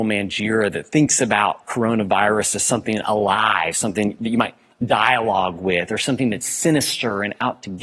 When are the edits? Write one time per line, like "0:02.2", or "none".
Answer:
none